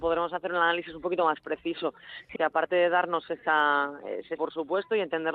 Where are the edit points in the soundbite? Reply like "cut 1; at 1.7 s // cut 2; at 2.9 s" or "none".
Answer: cut 1; at 2.4 s // cut 2; at 4.4 s